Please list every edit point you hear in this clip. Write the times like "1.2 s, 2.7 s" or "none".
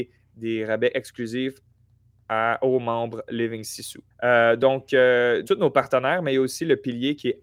4.1 s, 5.4 s